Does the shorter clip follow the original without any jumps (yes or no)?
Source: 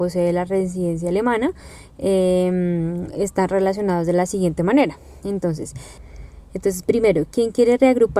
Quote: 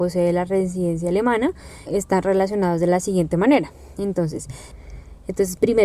no